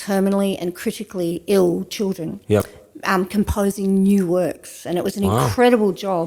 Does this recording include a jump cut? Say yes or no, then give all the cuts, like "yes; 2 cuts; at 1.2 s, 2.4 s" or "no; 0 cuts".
no; 0 cuts